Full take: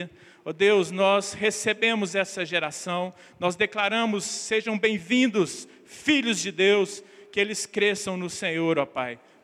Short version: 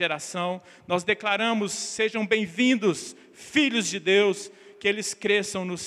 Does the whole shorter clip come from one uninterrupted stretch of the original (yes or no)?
yes